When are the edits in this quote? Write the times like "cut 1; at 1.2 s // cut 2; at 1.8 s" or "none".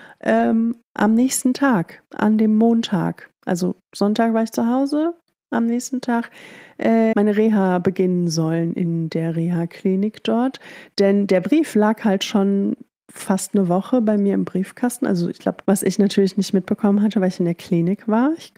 cut 1; at 7.1 s // cut 2; at 15.6 s